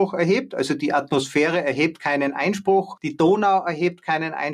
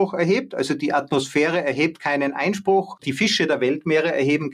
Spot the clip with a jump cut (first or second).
second